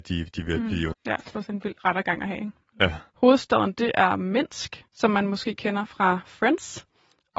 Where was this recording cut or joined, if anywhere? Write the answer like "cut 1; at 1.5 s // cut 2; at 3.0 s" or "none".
cut 1; at 0.9 s // cut 2; at 3.1 s // cut 3; at 4.9 s